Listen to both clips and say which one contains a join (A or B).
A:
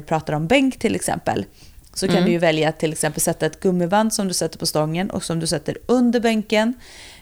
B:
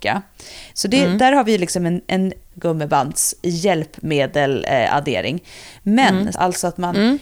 B